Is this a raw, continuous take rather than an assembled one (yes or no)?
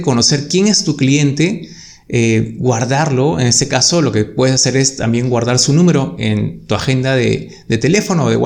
yes